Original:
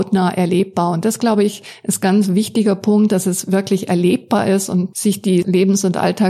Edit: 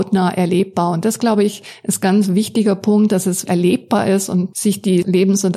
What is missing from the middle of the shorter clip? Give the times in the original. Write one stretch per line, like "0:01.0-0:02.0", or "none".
0:03.5-0:03.9